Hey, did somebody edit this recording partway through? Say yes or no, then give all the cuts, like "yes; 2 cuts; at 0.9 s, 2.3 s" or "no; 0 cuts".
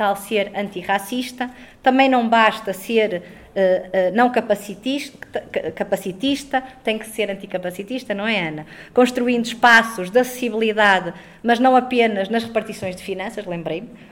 no; 0 cuts